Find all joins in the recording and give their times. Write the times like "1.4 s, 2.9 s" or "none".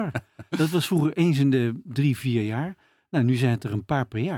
none